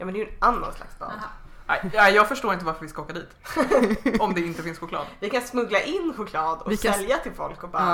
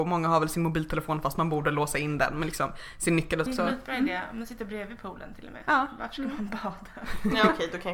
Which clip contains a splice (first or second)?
second